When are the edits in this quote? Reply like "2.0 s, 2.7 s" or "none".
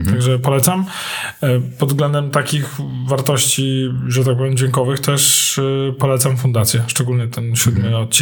none

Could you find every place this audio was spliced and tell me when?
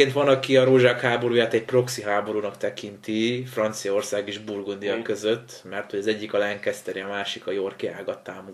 none

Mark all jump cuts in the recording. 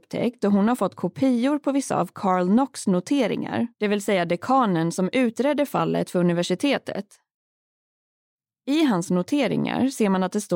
3.7 s

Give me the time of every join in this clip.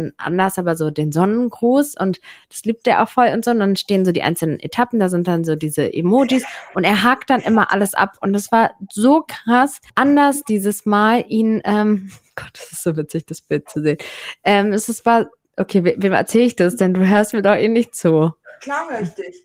9.9 s

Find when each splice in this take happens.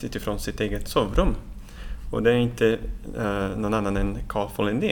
none

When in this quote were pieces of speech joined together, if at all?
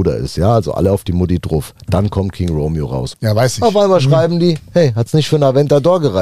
3.1 s

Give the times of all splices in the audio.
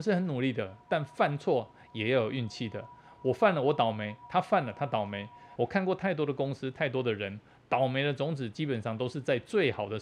5.6 s

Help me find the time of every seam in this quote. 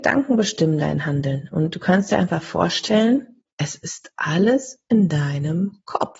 3.5 s

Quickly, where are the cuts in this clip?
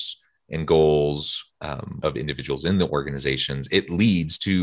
2.0 s

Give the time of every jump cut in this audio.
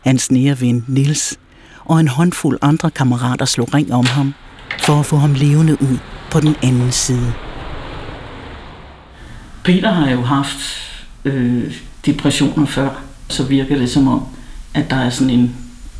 13.3 s

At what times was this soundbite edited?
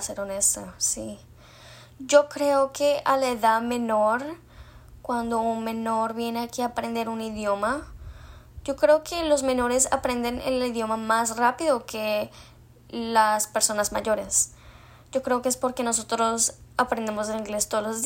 none

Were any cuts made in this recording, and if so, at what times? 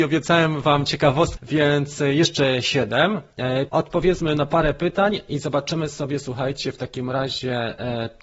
1.4 s, 3.7 s

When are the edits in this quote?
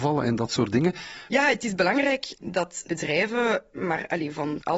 1.3 s

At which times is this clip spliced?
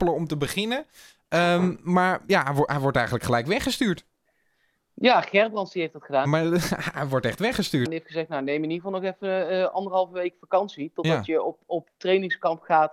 6.2 s, 7.8 s

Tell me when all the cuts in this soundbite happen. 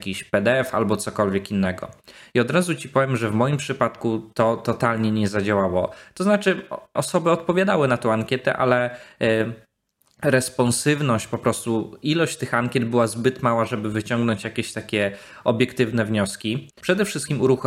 7.0 s, 16.7 s

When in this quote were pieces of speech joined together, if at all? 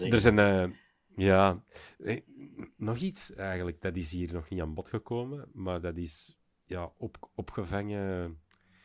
none

